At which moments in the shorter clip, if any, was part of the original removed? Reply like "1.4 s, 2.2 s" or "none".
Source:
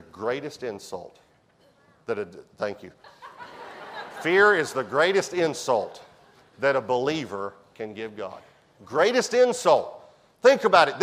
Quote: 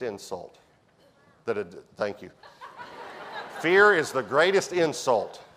none